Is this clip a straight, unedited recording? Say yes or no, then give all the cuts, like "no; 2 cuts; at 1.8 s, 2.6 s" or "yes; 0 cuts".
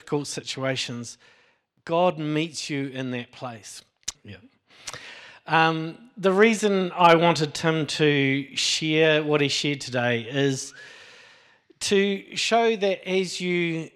no; 1 cut; at 4.1 s